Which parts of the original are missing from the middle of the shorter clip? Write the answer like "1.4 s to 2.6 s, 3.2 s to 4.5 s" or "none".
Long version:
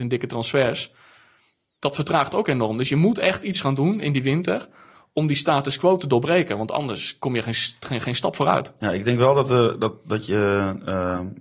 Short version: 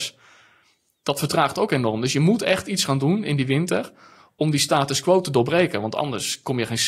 none

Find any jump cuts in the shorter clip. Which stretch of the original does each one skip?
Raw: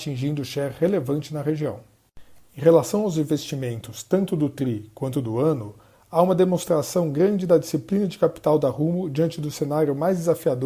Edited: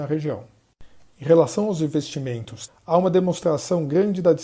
4.0 s to 5.9 s

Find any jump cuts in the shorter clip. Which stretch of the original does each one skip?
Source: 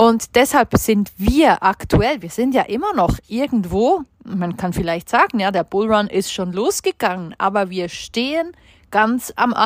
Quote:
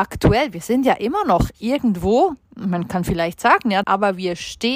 5.5 s to 7.4 s

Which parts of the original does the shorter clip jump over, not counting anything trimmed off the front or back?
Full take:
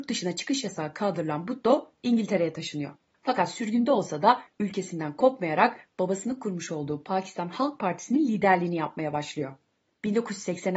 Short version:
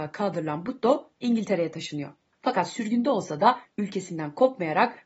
none

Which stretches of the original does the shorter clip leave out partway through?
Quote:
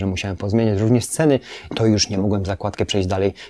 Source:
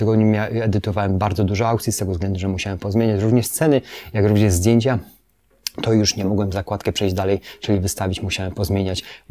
4.1 s to 5.8 s

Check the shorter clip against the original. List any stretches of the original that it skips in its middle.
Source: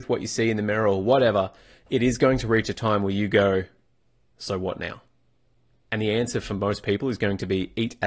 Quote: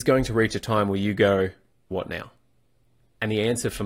4.0 s to 4.6 s

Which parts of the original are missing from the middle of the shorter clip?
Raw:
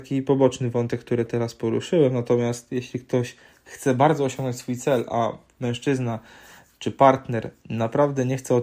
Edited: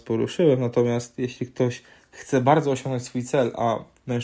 none

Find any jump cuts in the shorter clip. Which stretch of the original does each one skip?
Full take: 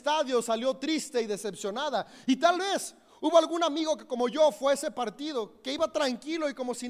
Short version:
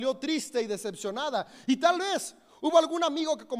none

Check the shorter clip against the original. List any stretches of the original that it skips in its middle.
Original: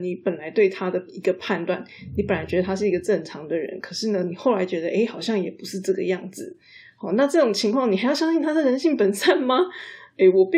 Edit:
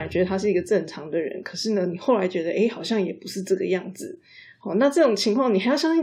none

